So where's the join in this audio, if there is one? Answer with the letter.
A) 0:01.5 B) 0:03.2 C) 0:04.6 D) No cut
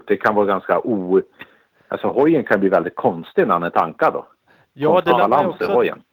D